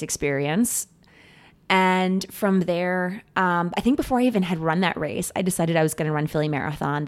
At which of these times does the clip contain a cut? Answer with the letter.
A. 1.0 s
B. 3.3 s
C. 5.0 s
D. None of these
D